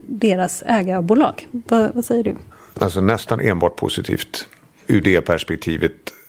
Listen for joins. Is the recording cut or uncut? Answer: uncut